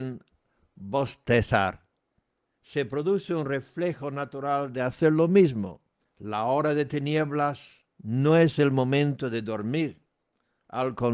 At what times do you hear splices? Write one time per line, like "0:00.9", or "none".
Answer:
0:06.1
0:07.9